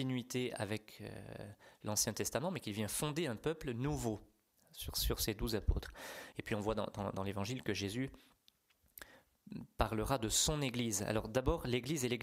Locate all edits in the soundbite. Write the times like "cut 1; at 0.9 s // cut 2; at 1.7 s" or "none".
cut 1; at 6.3 s